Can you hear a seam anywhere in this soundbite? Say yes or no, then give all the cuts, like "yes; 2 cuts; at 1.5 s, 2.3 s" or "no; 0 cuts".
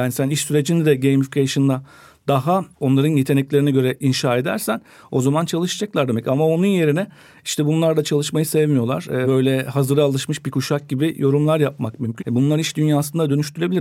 yes; 2 cuts; at 9.2 s, 12.2 s